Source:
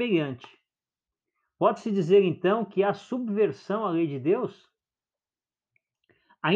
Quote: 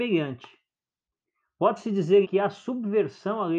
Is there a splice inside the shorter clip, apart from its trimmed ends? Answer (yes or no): yes